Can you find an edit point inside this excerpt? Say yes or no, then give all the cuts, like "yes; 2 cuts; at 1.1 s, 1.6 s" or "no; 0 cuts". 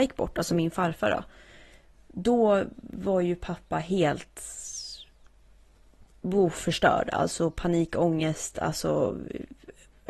no; 0 cuts